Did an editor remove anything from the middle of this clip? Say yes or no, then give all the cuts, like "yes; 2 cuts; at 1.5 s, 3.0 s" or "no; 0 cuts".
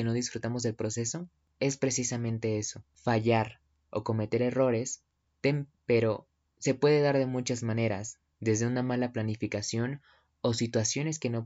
yes; 1 cut; at 5.8 s